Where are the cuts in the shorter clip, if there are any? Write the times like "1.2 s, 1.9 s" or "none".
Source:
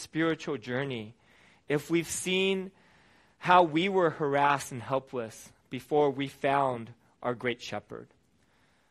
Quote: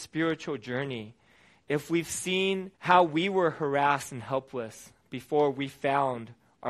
2.7 s

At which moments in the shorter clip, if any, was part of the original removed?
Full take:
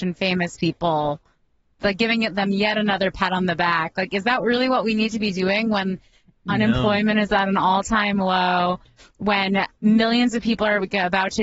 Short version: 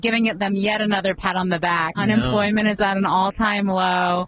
2.0 s

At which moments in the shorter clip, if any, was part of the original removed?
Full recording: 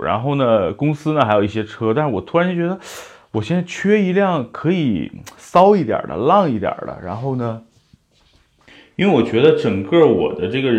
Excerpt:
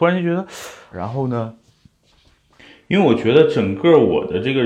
0.9 s

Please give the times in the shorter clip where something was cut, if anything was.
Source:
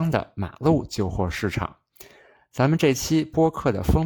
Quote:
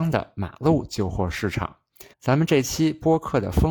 2.1 s

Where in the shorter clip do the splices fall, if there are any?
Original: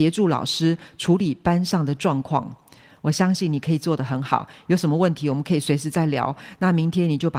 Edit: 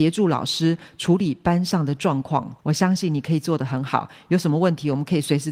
2.6 s

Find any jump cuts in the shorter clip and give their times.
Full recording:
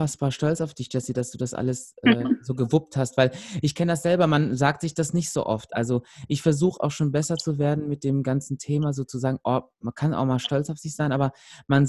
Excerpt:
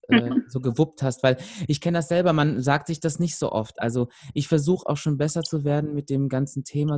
none

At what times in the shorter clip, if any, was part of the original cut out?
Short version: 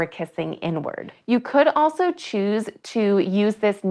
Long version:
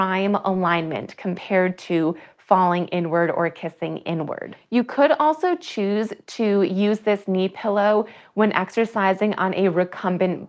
none

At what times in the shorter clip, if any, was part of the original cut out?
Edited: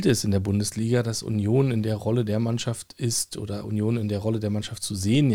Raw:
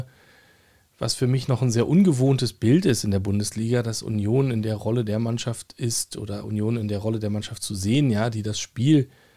none

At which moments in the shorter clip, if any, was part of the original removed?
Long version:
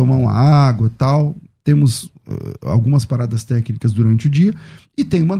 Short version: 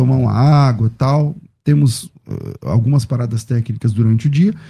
none

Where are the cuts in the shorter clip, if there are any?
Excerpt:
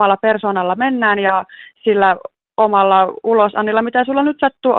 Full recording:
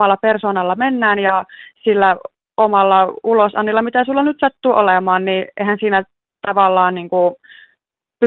none

